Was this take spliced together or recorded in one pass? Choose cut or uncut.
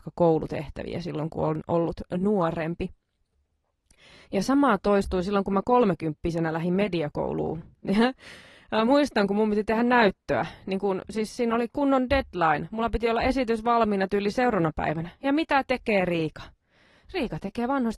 uncut